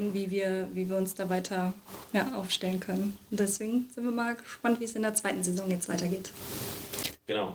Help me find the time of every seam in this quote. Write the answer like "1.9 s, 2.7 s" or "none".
none